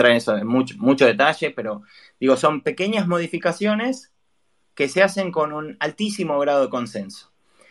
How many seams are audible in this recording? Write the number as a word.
zero